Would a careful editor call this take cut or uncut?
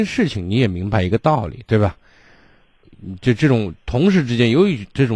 cut